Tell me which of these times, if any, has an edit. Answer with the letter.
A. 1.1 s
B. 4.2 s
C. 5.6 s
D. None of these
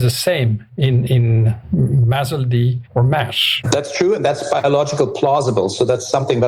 A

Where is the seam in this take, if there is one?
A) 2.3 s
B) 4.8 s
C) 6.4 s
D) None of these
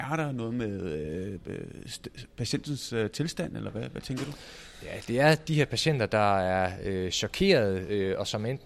D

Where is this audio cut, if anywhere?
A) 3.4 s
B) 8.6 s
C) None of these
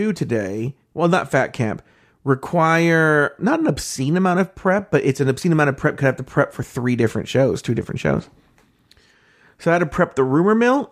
A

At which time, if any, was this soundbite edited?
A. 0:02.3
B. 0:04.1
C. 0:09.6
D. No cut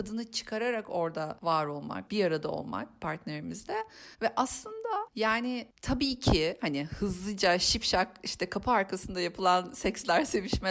B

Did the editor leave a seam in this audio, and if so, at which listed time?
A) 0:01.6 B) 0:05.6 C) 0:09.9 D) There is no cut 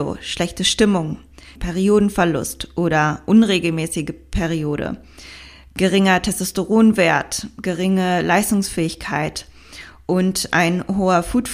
A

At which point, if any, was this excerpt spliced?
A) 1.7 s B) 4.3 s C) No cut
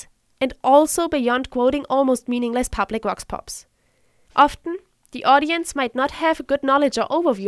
B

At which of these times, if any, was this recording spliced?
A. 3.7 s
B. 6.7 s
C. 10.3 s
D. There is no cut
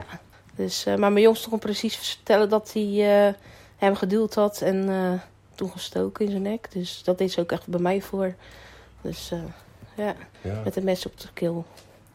C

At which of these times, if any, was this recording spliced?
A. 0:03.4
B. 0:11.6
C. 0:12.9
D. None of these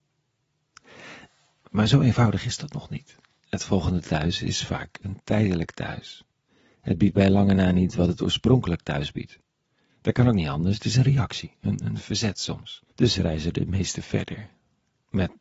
C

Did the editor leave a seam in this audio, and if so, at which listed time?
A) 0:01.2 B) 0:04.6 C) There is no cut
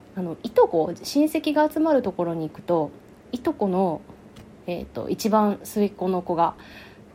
C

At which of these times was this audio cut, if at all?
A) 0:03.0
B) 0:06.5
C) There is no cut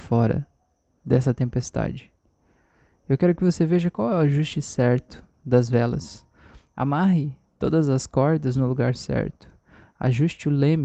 C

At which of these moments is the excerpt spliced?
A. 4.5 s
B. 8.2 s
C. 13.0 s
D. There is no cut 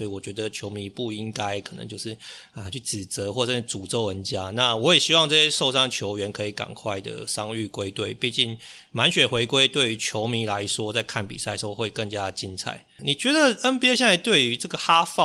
C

